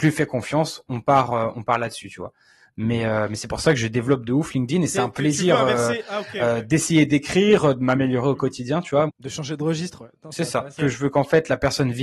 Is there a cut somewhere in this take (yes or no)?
yes